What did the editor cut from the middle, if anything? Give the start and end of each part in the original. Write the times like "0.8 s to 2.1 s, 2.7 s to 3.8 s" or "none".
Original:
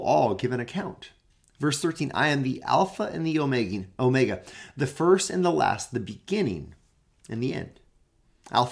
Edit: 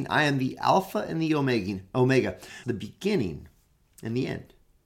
4.7 s to 5.9 s